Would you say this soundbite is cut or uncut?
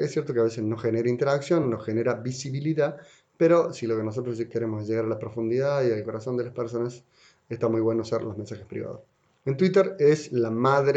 uncut